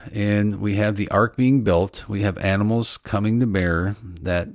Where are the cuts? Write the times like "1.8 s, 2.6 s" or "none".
none